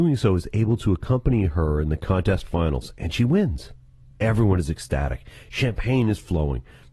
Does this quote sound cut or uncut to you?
uncut